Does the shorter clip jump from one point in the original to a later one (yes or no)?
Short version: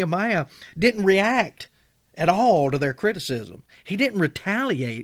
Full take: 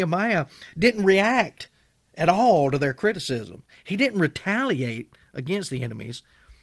no